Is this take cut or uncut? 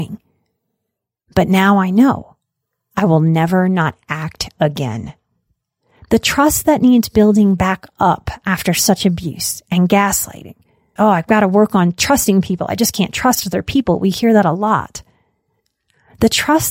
cut